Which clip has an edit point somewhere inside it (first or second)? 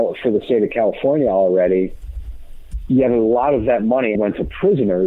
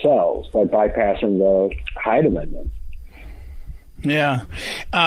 first